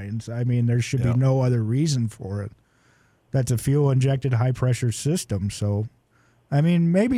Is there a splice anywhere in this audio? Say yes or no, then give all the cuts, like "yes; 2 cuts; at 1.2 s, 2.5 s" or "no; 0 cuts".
no; 0 cuts